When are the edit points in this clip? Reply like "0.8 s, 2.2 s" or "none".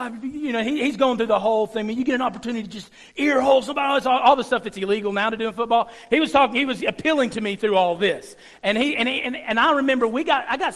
none